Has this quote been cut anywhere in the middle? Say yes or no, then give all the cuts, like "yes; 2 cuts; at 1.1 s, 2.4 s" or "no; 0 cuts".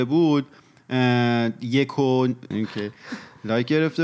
yes; 1 cut; at 2.5 s